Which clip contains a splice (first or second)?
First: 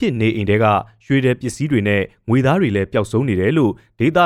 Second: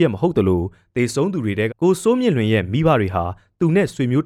second